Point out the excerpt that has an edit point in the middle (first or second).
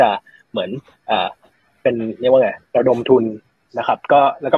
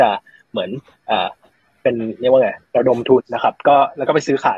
second